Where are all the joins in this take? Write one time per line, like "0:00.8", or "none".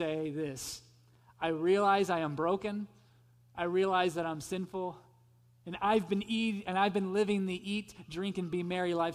none